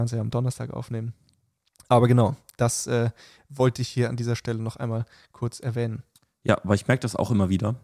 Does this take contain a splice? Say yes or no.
no